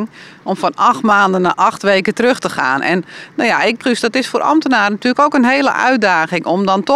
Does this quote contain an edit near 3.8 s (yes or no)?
yes